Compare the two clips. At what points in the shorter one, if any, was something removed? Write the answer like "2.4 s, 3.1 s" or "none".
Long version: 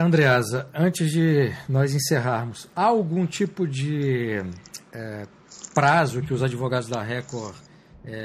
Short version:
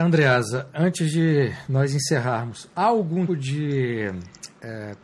3.3 s